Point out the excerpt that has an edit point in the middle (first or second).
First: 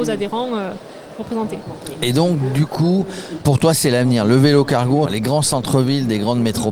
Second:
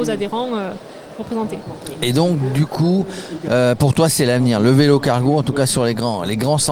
first